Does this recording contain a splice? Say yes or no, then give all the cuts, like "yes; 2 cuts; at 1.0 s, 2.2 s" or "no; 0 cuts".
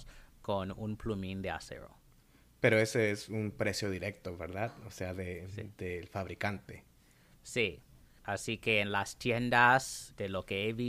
no; 0 cuts